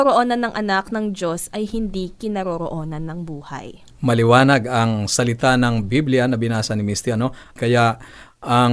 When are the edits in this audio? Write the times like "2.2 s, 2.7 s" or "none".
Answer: 7.6 s